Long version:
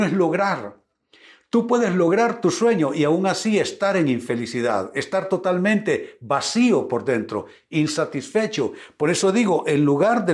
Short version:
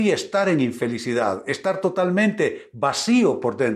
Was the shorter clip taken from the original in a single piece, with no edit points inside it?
yes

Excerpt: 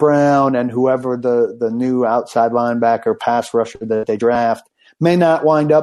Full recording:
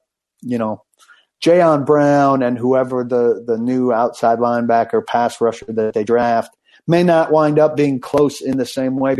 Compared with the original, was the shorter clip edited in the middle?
no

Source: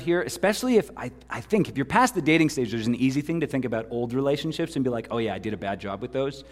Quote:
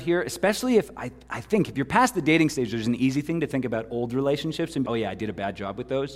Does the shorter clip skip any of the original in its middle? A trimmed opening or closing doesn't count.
yes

